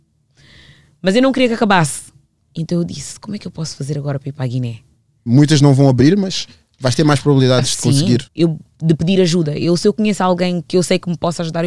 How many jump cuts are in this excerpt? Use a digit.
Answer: 3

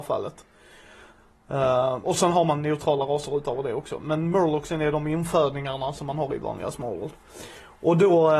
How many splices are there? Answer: 1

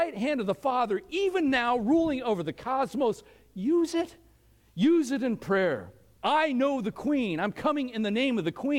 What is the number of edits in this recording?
1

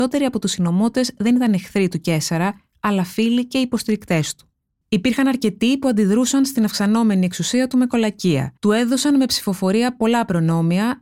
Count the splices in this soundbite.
2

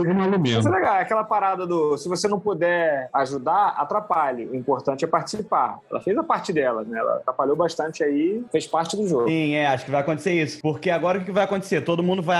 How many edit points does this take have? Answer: 1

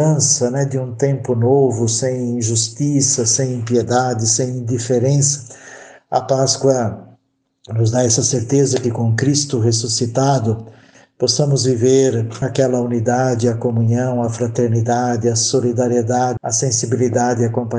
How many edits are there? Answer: 2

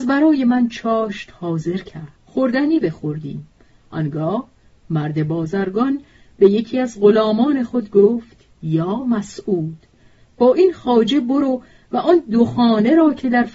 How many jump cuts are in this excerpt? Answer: 1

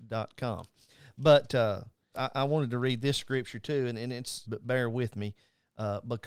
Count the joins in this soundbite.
2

